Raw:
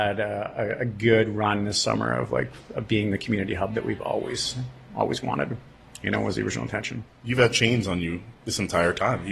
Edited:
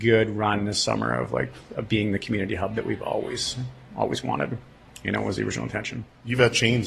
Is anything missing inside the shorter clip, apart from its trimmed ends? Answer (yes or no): no